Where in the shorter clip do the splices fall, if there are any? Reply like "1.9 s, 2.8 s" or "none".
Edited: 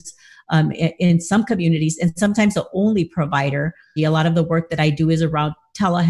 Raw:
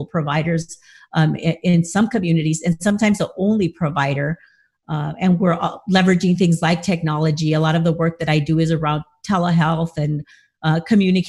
4.0 s